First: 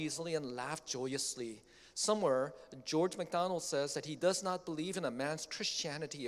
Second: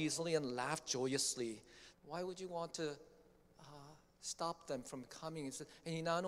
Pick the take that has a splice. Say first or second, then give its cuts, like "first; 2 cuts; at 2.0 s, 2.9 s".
second; 1 cut; at 1.9 s